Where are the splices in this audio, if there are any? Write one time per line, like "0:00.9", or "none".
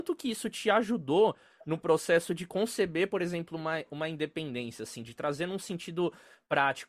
none

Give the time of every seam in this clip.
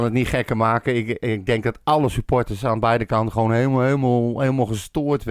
none

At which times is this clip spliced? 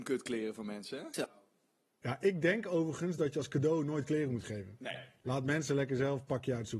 none

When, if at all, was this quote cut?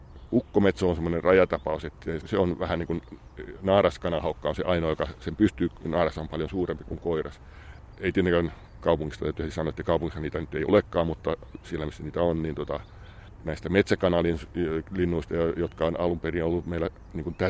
0:02.2

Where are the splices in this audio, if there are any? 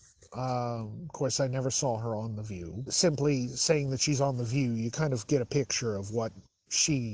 0:02.9

